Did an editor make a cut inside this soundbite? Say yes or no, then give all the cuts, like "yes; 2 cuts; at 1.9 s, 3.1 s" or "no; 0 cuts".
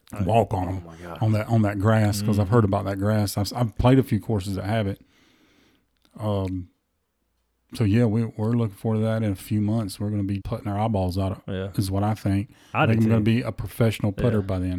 yes; 1 cut; at 10.4 s